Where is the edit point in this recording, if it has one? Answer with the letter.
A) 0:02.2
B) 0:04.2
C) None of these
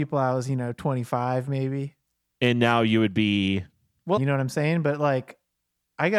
B